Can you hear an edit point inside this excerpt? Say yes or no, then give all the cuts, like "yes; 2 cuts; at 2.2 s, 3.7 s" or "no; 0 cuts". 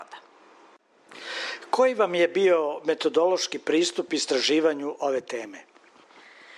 no; 0 cuts